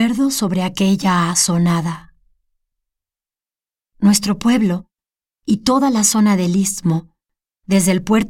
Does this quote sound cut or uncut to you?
uncut